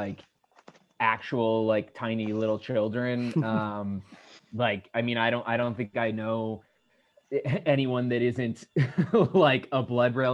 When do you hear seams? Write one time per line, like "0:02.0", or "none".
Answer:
none